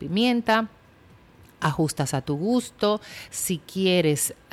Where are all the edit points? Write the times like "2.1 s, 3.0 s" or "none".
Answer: 3.3 s